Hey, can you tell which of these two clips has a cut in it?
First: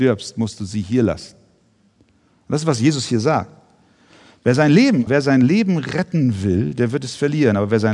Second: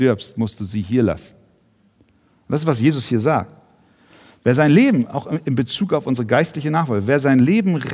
first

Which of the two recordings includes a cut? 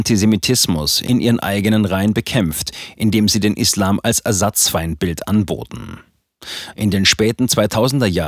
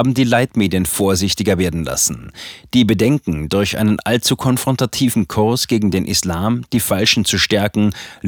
first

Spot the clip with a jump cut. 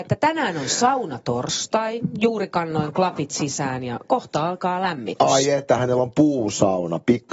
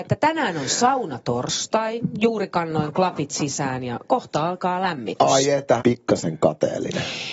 second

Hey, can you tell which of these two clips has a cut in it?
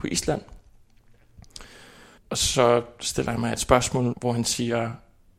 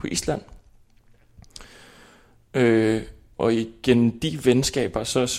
first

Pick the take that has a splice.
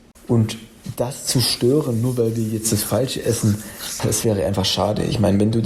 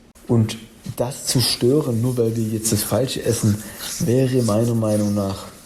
first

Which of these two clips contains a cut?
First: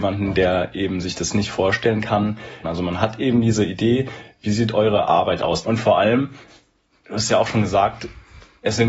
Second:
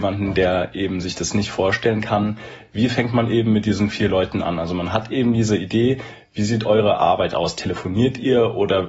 first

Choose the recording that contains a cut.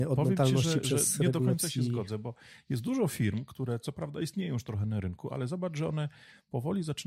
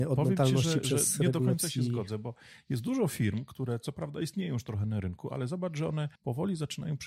second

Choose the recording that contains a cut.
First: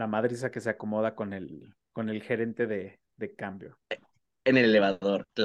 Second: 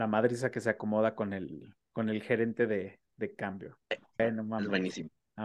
second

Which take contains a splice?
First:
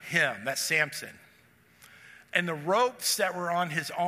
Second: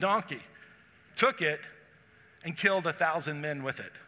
second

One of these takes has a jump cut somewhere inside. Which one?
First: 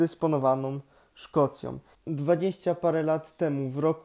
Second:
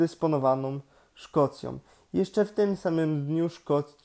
first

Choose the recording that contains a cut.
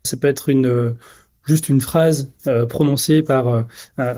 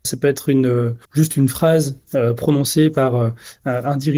second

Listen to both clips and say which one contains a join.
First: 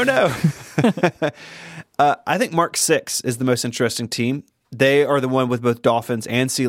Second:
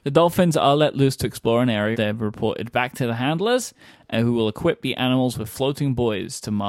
second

